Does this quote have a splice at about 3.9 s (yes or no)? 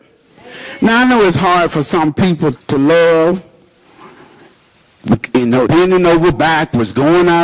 no